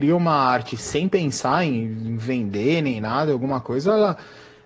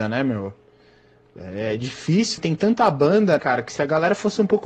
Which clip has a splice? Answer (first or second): second